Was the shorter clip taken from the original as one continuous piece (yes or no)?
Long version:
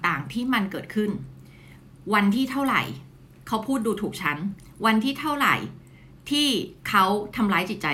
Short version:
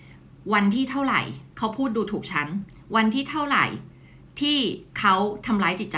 no